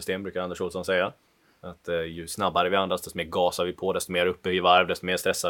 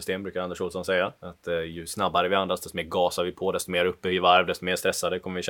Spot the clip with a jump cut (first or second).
second